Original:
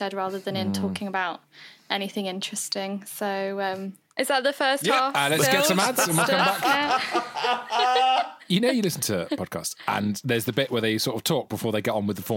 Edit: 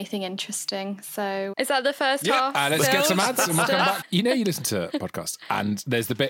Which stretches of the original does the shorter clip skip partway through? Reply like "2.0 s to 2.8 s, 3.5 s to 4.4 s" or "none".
3.6 s to 4.1 s, 6.6 s to 8.4 s